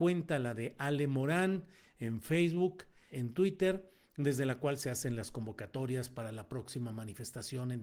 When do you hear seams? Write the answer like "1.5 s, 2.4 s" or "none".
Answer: 3.1 s